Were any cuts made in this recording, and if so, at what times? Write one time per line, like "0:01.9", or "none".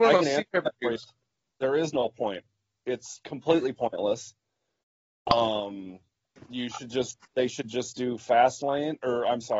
none